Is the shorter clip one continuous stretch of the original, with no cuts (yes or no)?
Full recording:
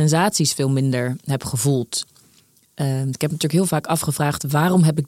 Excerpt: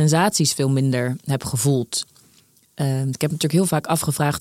yes